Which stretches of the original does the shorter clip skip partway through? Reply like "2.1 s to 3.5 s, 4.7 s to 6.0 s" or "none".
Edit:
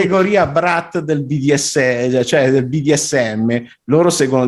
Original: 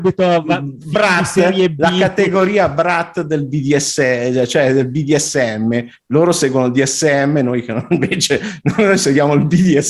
none